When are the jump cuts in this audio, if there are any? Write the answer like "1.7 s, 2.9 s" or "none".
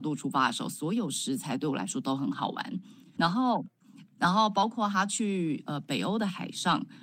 3.2 s